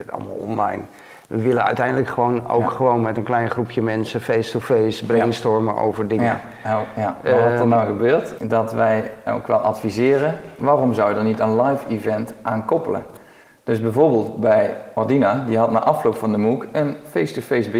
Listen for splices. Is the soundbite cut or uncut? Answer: cut